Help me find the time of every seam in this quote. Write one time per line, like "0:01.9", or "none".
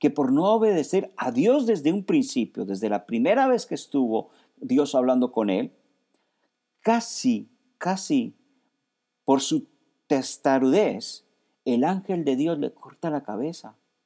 none